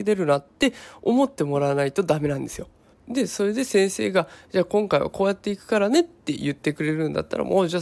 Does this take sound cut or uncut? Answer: cut